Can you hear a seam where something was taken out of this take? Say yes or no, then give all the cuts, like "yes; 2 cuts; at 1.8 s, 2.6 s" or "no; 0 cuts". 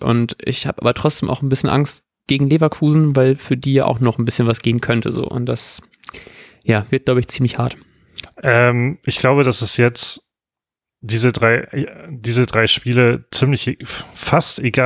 yes; 1 cut; at 8.3 s